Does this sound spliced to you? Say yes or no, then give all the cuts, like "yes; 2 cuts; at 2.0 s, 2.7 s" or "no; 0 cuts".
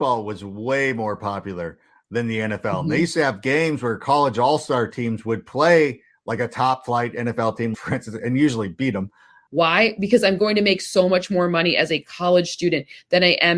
yes; 2 cuts; at 7.7 s, 9.5 s